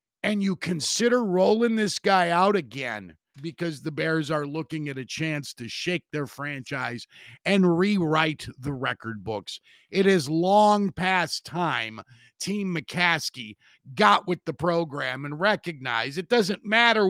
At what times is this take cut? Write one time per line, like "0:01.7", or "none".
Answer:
0:03.3